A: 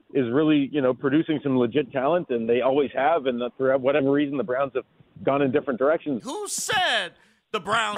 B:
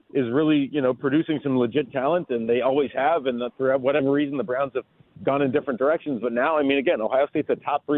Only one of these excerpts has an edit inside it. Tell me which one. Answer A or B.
A